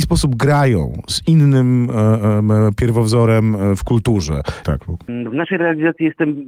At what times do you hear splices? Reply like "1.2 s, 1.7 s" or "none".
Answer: 4.6 s